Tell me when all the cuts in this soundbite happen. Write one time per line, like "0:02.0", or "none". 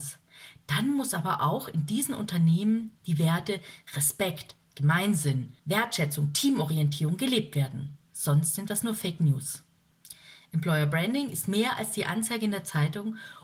0:05.6